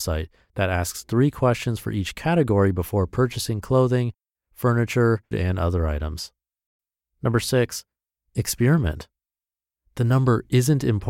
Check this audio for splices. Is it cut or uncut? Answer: cut